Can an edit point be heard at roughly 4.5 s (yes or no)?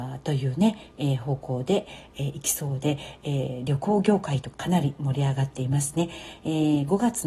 yes